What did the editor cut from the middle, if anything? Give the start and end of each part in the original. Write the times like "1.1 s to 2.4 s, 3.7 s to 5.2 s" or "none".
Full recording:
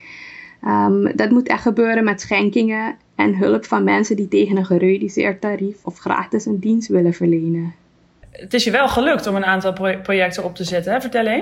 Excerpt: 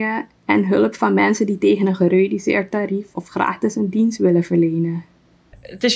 none